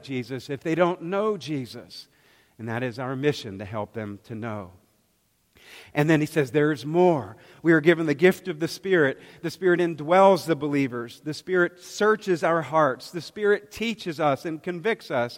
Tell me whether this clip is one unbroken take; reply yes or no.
yes